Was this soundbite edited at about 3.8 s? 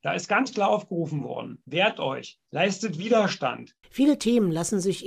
yes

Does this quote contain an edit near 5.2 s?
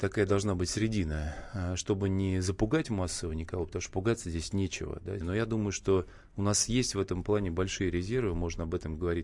yes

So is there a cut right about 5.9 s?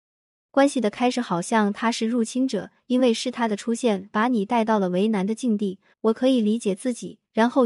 yes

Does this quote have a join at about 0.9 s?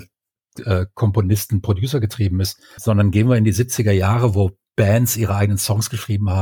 no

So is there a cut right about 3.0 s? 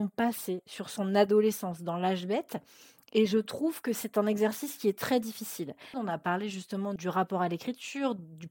no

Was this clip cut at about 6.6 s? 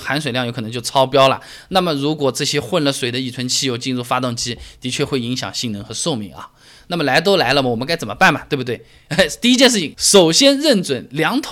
no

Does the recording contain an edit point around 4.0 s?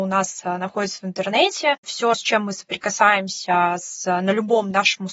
no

